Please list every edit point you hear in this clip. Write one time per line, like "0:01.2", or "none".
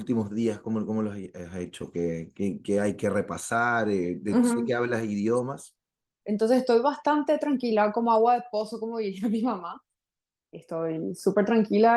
0:06.2